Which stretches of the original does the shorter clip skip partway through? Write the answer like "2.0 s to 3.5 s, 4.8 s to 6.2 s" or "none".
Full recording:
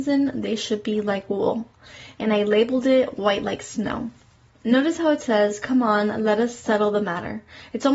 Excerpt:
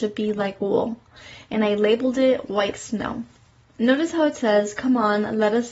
3.4 s to 3.6 s